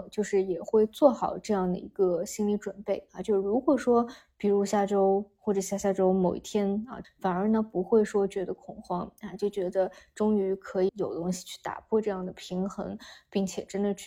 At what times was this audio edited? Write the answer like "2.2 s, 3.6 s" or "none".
7.0 s, 10.9 s